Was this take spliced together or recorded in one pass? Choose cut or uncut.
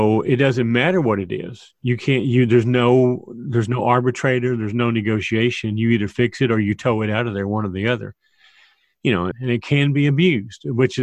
cut